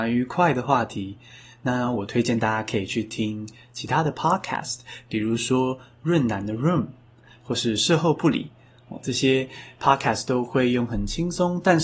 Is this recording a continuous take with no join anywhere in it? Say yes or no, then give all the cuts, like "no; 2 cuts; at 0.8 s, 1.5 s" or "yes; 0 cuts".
yes; 0 cuts